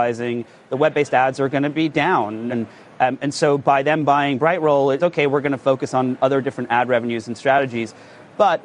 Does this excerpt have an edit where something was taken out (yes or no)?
yes